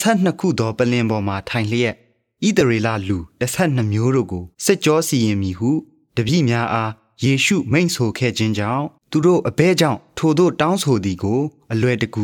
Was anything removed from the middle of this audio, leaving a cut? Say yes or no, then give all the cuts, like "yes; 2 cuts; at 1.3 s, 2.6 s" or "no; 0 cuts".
yes; 2 cuts; at 4.5 s, 9.0 s